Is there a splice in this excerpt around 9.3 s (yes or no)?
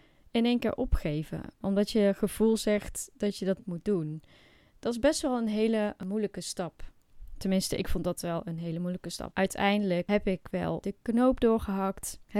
yes